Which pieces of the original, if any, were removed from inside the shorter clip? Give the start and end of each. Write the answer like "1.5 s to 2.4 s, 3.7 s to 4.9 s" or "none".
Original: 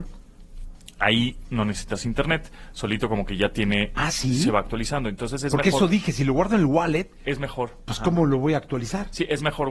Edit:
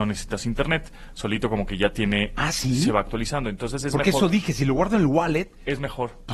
none